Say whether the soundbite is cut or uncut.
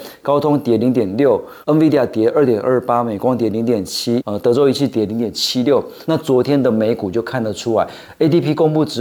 cut